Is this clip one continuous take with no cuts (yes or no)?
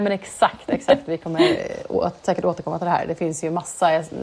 yes